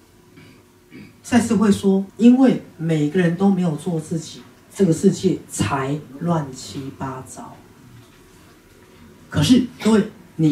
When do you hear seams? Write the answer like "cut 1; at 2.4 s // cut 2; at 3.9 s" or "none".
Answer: cut 1; at 2.1 s

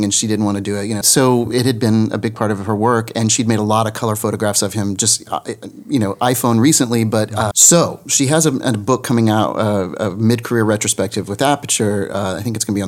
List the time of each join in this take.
cut 1; at 1.0 s // cut 2; at 7.5 s

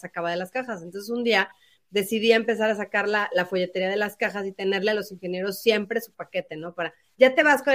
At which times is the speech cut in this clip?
none

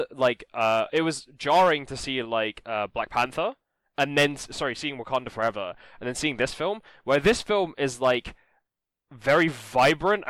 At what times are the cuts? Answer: none

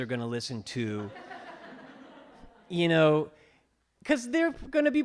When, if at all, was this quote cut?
none

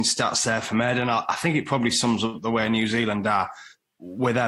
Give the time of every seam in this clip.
none

